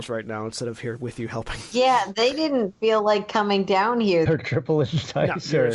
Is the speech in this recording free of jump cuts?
no; 1 cut; at 4.3 s

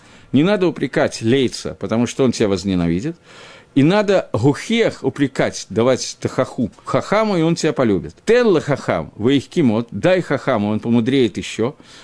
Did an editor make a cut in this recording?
yes; 2 cuts; at 6.8 s, 8.2 s

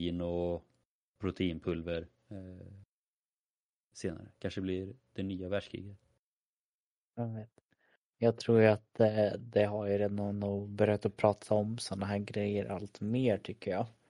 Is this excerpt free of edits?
yes; 0 cuts

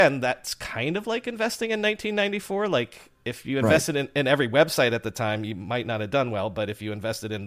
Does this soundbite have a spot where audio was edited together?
no; 0 cuts

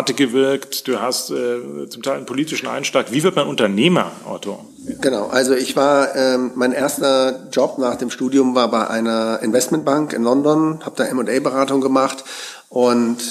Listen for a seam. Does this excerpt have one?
no; 0 cuts

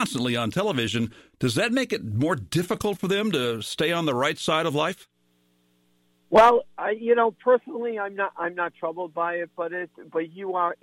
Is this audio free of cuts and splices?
yes; 0 cuts

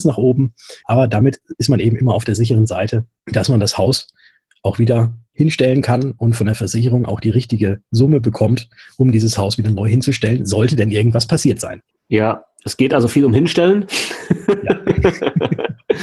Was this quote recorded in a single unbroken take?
no; 1 cut; at 11.9 s

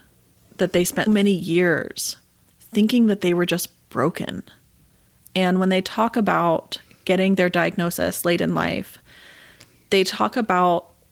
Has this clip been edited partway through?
yes; 2 cuts; at 1.1 s, 5.2 s

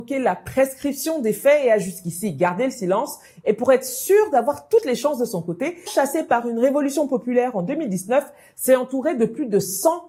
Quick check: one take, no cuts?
no; 1 cut; at 5.9 s

